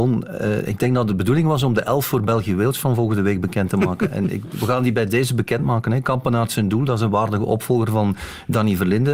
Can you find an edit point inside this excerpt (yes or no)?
no